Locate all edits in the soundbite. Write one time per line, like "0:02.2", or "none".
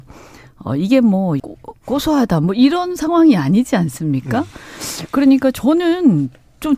0:01.4